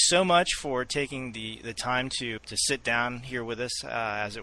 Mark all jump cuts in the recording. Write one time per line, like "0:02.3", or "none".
0:02.4